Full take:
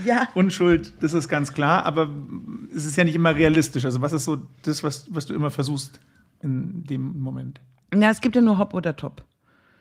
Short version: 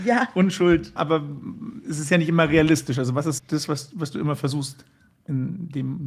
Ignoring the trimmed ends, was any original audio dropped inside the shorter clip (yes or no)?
yes